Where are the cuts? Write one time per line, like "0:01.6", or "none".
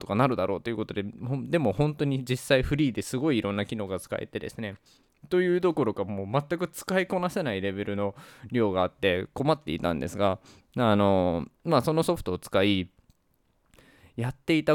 none